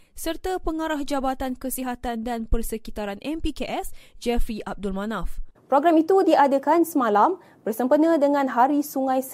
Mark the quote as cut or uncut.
cut